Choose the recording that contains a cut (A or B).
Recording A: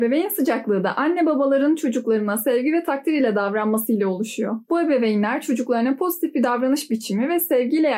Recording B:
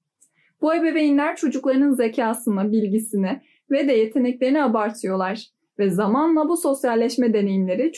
A